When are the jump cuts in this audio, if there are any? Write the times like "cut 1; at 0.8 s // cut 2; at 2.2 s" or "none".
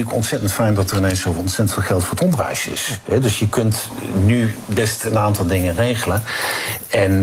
none